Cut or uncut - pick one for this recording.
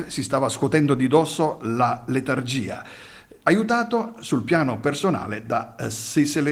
cut